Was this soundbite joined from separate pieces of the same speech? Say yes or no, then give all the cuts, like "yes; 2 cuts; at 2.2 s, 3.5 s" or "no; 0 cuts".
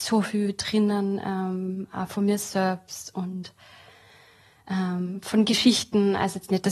no; 0 cuts